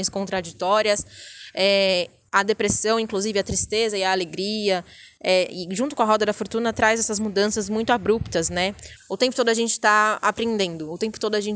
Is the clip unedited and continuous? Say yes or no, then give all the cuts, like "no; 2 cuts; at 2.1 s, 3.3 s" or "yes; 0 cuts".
no; 1 cut; at 9.0 s